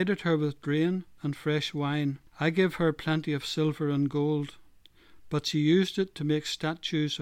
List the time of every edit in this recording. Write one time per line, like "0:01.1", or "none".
0:01.2
0:02.3